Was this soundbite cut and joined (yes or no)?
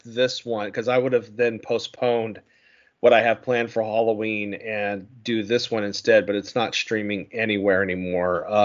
no